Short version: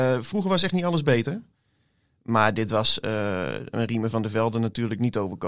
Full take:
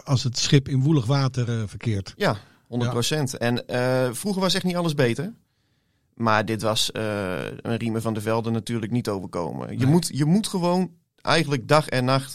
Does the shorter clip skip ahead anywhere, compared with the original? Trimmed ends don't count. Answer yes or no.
no